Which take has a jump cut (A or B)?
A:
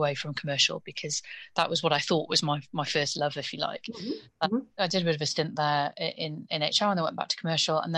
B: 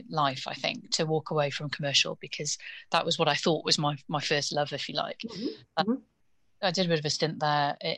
A